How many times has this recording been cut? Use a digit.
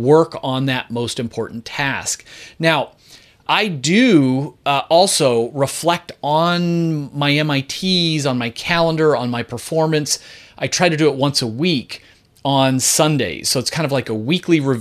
1